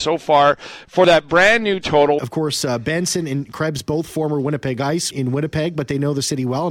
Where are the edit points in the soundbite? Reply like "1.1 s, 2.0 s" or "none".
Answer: 2.2 s, 5.1 s